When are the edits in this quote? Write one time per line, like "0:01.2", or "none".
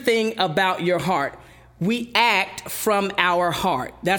none